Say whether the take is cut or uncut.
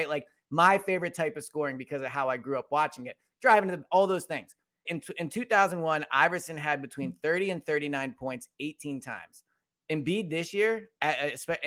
cut